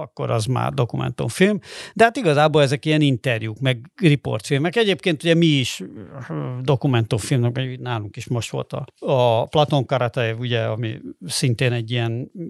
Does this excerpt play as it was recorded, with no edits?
yes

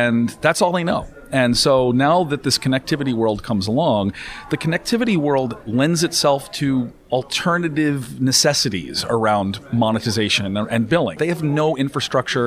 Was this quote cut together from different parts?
yes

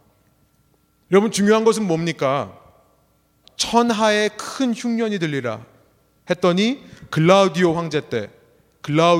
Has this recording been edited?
yes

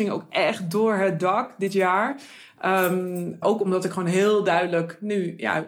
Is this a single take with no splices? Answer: no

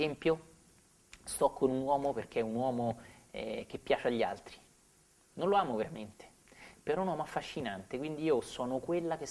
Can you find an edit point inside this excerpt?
no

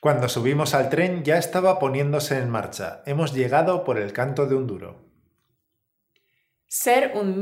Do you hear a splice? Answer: no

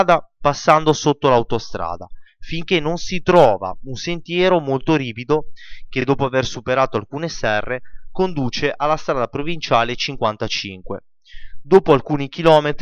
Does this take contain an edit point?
no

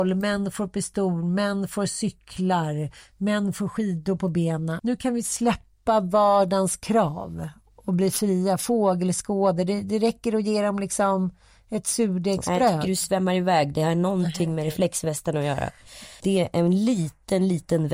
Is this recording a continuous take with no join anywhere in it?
no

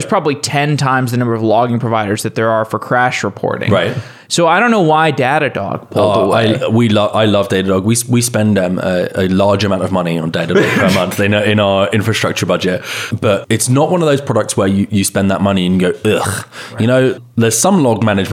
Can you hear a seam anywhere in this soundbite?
no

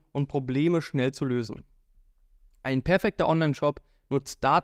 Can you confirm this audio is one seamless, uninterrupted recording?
yes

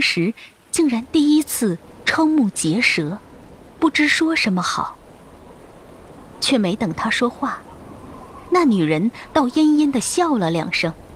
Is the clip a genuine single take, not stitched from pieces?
yes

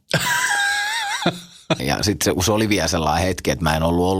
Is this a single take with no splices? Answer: no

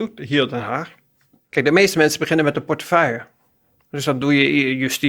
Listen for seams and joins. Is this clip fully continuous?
yes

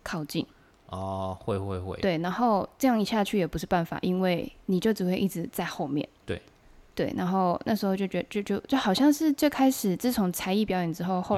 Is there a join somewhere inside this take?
no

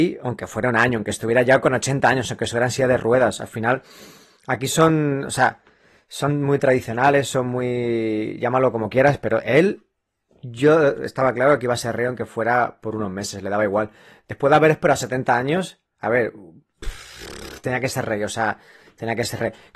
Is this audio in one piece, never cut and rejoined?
no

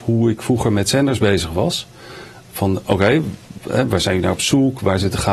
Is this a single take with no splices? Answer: yes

